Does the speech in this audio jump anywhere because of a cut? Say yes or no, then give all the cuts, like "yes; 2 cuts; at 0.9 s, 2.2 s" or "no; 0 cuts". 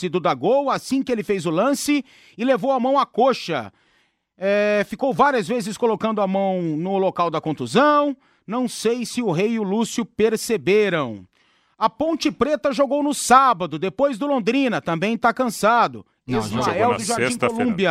no; 0 cuts